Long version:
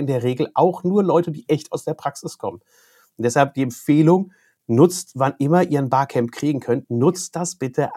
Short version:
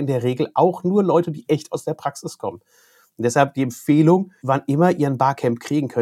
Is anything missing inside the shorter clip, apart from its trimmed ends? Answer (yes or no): yes